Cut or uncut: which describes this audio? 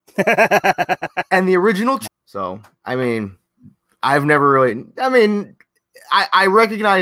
cut